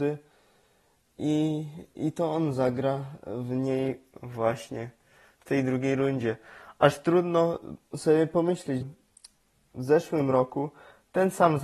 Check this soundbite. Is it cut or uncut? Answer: cut